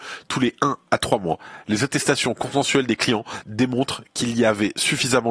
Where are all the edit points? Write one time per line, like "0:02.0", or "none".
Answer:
none